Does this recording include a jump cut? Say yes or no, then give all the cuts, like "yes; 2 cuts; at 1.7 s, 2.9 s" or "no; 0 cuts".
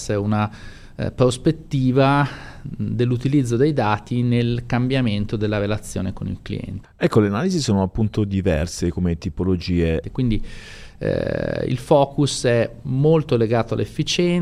yes; 2 cuts; at 6.8 s, 10.0 s